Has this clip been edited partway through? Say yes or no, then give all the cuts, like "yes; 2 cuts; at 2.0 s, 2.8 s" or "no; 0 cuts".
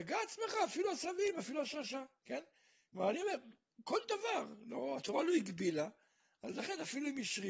no; 0 cuts